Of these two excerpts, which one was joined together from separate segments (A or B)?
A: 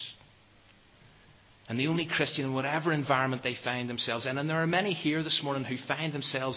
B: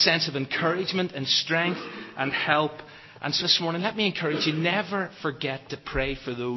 B